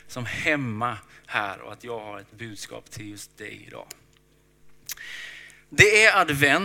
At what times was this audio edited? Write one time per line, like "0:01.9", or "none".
none

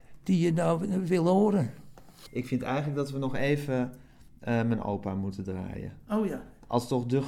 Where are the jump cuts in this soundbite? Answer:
none

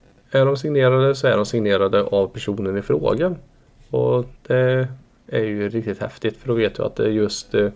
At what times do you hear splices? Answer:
0:04.4
0:05.7

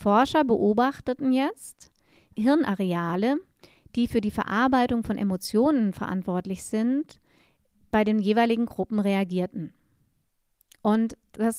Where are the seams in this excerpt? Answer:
0:02.3

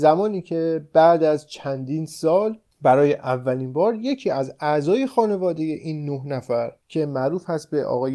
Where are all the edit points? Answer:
0:06.8

